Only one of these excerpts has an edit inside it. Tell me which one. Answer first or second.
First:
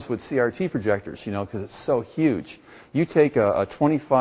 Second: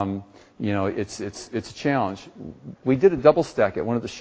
second